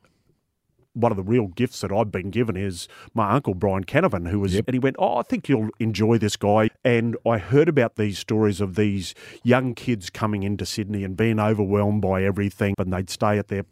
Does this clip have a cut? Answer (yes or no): yes